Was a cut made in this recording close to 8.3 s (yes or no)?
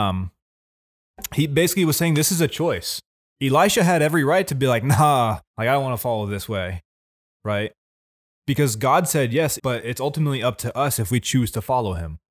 no